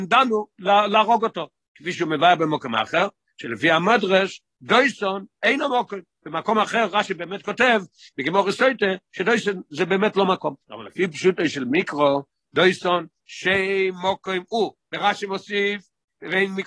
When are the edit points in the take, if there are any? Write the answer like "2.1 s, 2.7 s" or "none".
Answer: 10.6 s